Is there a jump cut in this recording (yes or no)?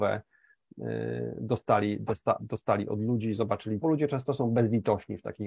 yes